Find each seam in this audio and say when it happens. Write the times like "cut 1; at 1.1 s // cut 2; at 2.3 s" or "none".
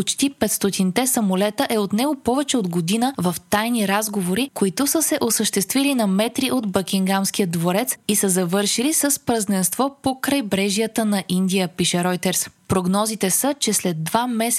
cut 1; at 12.6 s